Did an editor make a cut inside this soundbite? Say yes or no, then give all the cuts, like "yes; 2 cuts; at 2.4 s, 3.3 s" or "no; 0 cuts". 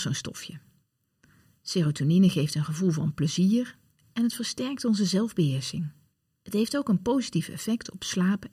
no; 0 cuts